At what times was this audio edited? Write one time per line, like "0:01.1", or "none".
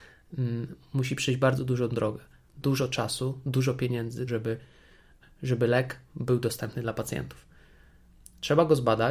0:04.3